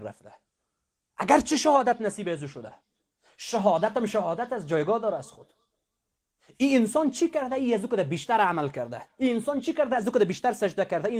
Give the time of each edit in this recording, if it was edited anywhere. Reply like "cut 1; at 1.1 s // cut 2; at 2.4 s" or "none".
none